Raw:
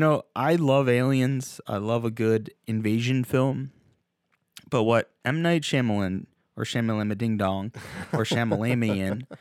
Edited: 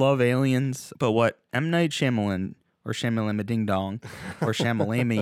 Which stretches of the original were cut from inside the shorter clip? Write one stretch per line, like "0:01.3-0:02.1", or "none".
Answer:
0:01.6-0:04.7